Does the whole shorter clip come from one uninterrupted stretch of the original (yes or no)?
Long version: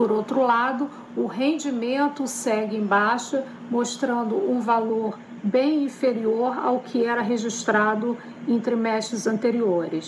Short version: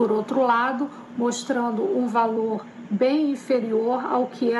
no